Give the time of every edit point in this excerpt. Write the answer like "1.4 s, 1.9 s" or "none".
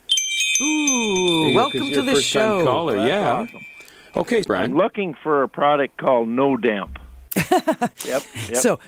4.4 s, 7.3 s